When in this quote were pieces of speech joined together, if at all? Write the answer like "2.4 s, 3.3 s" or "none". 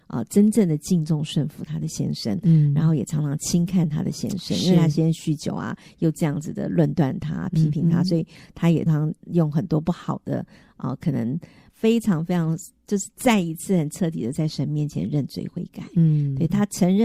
8.9 s, 11.7 s